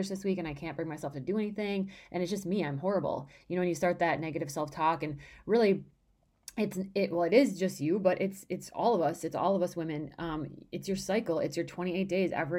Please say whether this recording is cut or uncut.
uncut